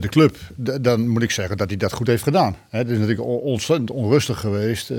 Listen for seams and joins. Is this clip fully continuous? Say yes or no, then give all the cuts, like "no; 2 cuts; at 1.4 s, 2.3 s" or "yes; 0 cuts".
yes; 0 cuts